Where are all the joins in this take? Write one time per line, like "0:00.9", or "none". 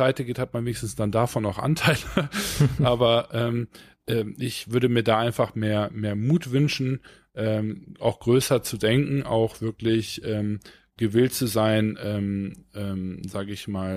none